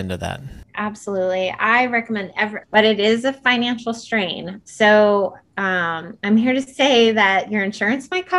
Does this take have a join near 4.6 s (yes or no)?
yes